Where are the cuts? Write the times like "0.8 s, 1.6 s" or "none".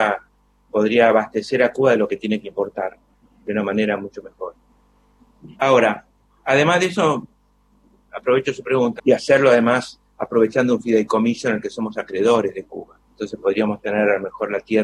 5.5 s, 9.0 s, 13.0 s